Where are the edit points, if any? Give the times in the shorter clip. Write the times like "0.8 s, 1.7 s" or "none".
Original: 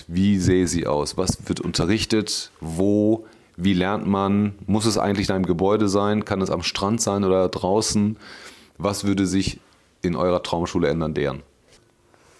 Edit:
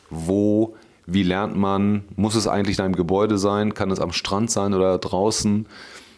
none